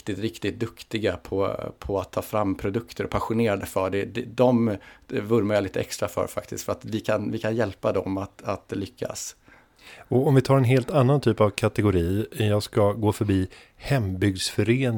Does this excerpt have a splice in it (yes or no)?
no